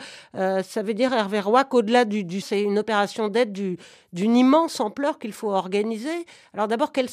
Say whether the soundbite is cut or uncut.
cut